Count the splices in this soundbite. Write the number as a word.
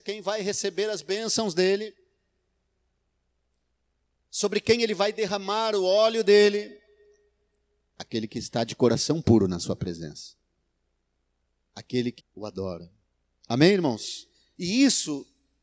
two